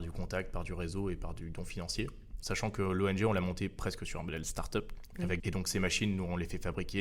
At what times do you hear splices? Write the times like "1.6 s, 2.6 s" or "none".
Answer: 2.4 s, 5.4 s

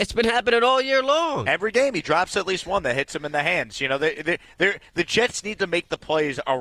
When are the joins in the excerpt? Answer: none

